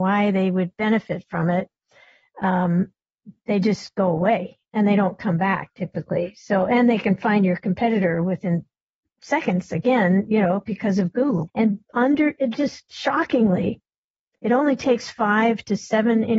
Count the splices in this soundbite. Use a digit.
1